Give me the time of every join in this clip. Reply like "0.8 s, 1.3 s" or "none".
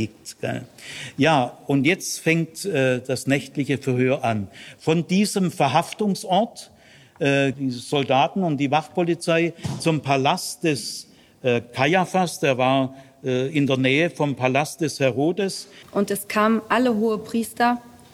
7.5 s, 15.8 s